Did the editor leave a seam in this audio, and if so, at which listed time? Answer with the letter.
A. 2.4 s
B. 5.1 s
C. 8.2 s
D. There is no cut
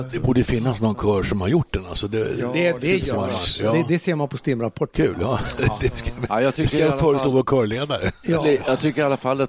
D